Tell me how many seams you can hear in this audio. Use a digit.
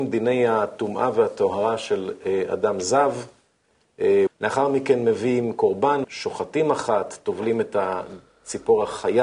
2